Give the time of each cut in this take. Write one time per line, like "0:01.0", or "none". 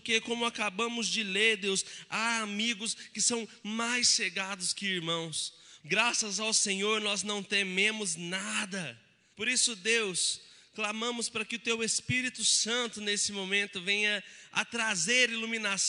0:05.8
0:09.3